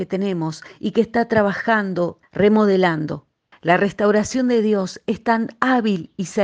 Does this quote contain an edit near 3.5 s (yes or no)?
yes